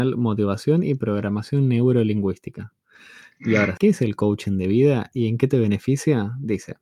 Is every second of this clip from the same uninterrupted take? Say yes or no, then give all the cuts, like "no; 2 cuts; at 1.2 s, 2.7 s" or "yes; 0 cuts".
no; 1 cut; at 3.8 s